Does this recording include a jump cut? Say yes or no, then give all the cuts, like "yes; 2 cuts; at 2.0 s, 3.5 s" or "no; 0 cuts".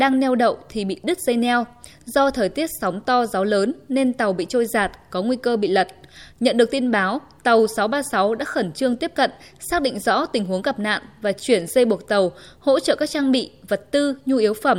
no; 0 cuts